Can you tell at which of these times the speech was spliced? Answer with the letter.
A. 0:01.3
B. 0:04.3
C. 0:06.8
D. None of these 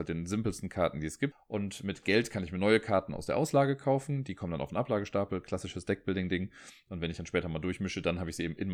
A